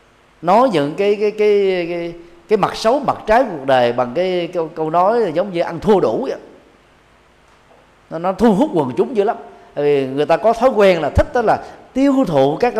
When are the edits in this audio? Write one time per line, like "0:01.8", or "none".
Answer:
none